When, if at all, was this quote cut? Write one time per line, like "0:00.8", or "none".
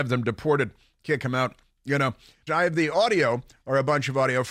0:02.5